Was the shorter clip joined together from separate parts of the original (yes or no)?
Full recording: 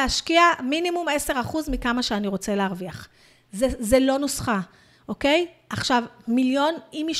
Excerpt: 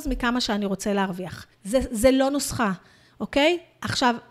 yes